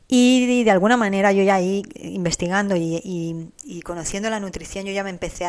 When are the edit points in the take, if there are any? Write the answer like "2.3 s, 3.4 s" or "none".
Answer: 3.6 s